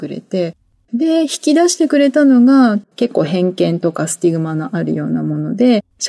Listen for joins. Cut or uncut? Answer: cut